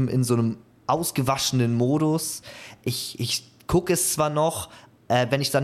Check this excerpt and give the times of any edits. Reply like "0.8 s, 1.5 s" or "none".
none